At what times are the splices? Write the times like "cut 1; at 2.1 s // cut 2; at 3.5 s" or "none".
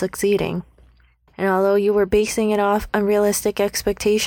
cut 1; at 1.3 s